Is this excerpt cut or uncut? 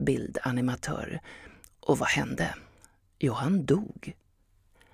uncut